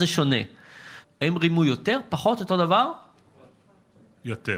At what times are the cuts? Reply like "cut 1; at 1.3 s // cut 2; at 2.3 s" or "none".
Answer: cut 1; at 1.0 s